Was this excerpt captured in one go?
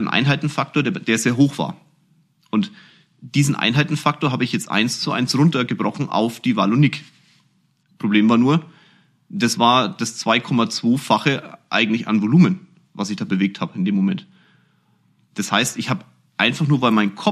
yes; 0 cuts

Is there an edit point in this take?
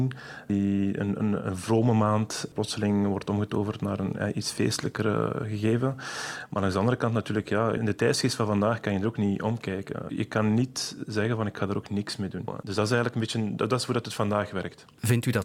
yes; 2 cuts; at 10.1 s, 12.5 s

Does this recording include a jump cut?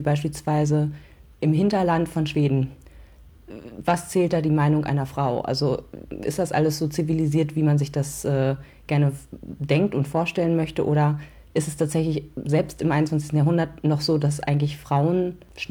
no; 0 cuts

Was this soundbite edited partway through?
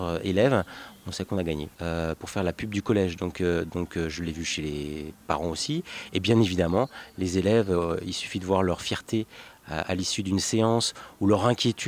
yes; 1 cut; at 1.7 s

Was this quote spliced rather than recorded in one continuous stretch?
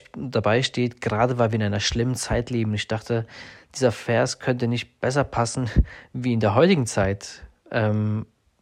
no; 0 cuts

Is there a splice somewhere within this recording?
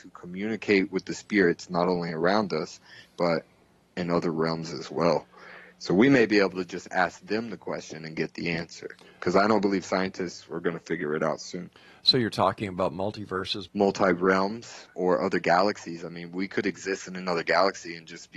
yes; 2 cuts; at 13.7 s, 14.9 s

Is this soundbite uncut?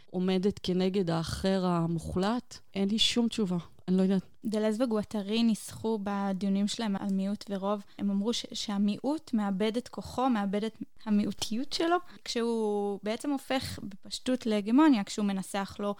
no; 1 cut; at 7.0 s

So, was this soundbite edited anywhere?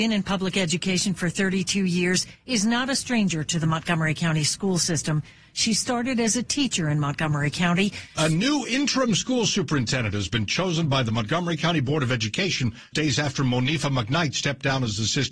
yes; 2 cuts; at 8.2 s, 12.9 s

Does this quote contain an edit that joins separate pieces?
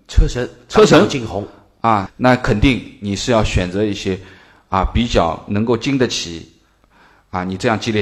yes; 1 cut; at 2.1 s

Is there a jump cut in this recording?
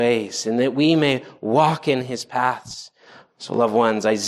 yes; 1 cut; at 3.3 s

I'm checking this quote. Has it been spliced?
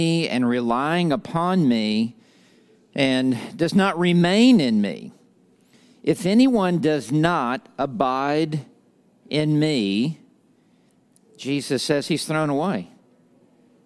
no; 0 cuts

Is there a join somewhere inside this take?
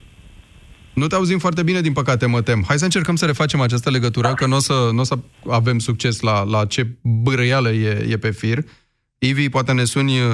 no; 0 cuts

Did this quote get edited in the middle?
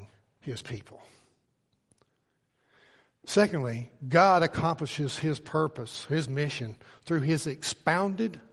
no; 0 cuts

